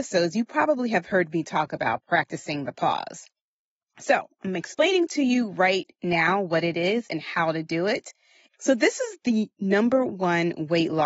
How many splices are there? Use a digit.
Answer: 1